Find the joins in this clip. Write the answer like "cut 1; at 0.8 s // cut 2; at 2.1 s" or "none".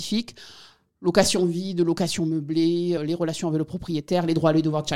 cut 1; at 3.0 s

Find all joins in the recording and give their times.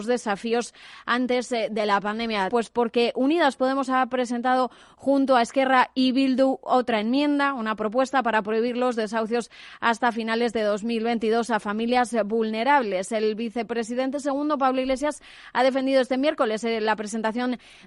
cut 1; at 2.5 s

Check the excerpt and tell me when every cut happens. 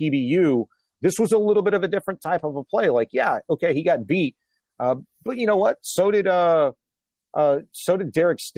cut 1; at 0.9 s

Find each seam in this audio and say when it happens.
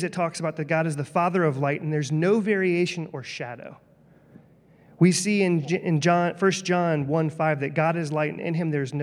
none

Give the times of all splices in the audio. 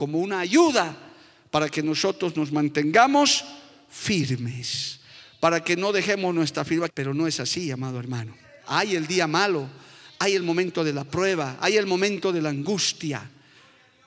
cut 1; at 6.9 s

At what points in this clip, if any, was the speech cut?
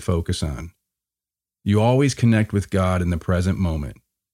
cut 1; at 1.5 s

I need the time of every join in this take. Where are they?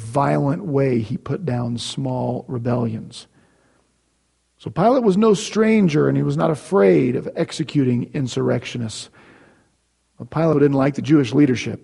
cut 1; at 10.5 s

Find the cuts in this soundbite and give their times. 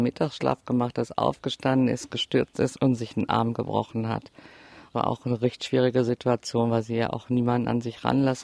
none

